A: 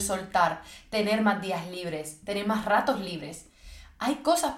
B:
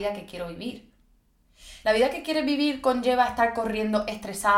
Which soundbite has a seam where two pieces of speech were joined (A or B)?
B